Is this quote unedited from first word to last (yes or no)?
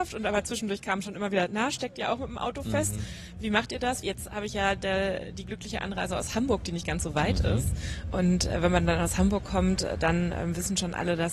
no